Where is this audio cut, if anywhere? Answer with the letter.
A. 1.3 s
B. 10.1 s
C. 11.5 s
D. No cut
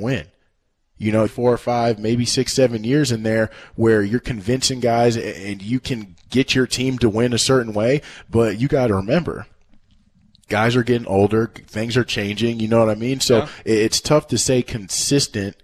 A